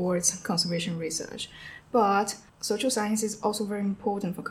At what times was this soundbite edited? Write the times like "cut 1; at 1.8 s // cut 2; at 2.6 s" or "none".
cut 1; at 1.8 s

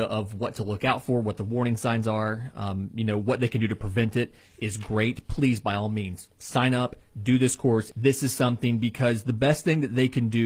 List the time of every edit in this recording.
cut 1; at 7.9 s

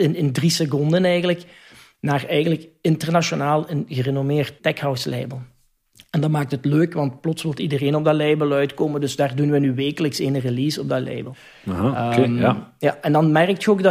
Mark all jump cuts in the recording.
none

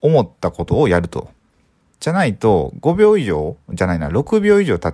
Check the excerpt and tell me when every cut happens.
none

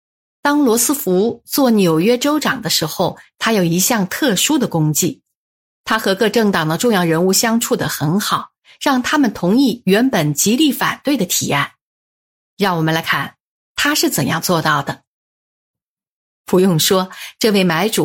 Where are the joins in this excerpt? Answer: cut 1; at 13.0 s // cut 2; at 16.3 s

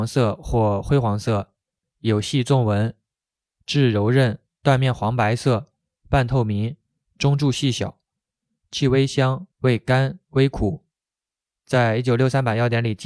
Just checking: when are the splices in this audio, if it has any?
none

